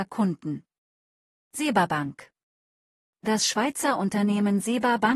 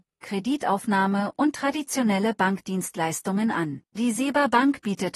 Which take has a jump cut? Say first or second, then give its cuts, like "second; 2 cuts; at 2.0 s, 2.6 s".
second; 1 cut; at 3.9 s